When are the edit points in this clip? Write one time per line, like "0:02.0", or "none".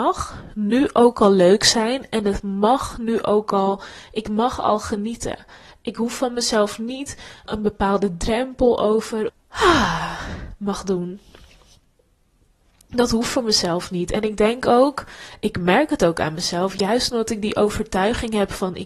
0:07.5
0:09.3